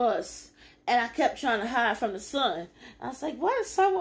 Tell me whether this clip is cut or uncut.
uncut